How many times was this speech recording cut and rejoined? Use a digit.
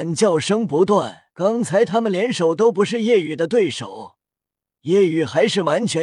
2